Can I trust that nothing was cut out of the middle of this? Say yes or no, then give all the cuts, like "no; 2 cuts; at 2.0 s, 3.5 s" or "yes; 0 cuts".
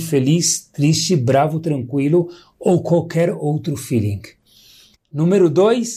no; 1 cut; at 4.9 s